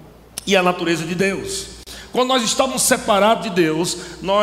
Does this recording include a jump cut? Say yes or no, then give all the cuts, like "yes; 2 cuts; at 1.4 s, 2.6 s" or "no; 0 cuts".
no; 0 cuts